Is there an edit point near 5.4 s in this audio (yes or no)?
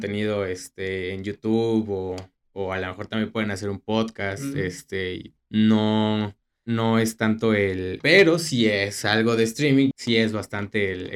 yes